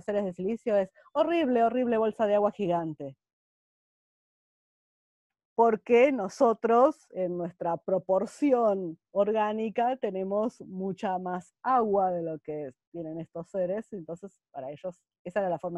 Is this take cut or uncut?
uncut